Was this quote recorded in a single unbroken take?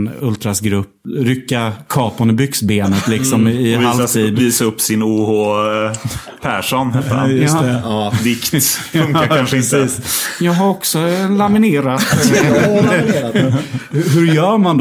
yes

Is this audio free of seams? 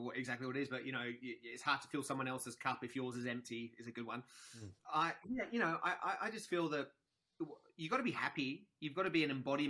no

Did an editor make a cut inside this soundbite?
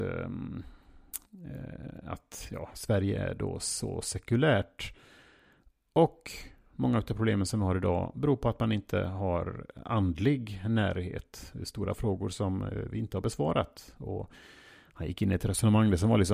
no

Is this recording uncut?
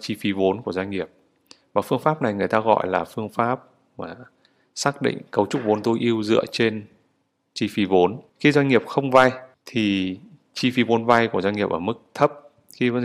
no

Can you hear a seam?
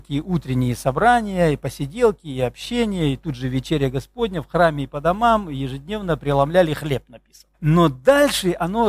yes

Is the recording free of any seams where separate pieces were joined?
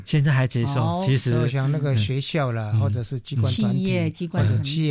yes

